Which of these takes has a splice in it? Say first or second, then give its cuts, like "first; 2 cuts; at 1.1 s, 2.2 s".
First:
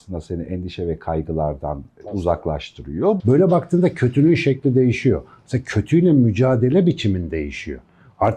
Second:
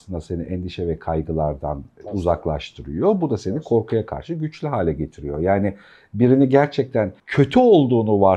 first; 1 cut; at 3.2 s